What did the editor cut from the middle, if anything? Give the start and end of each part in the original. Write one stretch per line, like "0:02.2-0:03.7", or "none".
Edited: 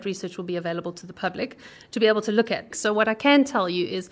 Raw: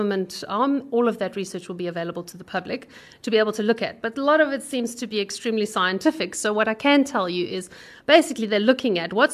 0:04.0-0:06.3

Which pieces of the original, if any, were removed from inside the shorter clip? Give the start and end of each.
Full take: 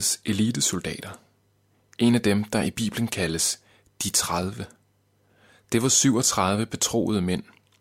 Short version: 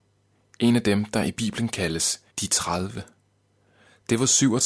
0:03.7-0:03.9

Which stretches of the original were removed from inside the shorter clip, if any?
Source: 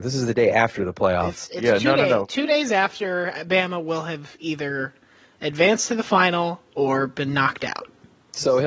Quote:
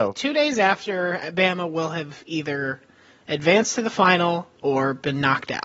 none

